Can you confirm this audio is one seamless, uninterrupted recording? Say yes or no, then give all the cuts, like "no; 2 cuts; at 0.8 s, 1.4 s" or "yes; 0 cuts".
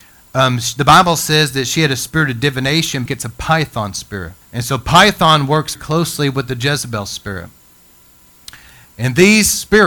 no; 3 cuts; at 3.1 s, 4.4 s, 5.7 s